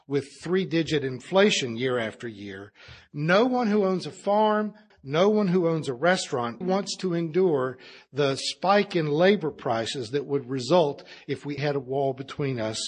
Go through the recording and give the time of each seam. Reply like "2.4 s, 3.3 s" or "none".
4.9 s, 6.6 s, 11.6 s